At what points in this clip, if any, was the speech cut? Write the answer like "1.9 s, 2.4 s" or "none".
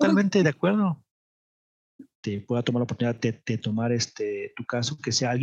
2.2 s